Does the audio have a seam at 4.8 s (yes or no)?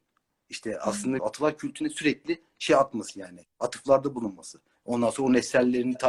yes